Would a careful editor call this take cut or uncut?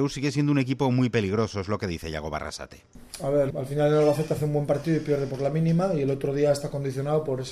cut